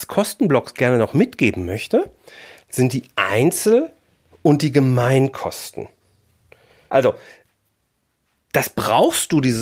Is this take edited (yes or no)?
yes